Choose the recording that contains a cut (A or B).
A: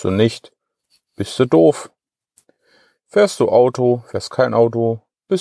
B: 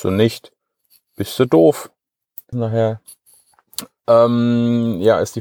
B